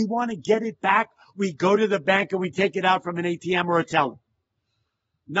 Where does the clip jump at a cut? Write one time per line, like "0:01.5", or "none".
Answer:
none